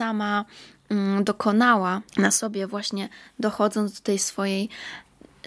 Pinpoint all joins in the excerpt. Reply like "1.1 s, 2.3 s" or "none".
2.1 s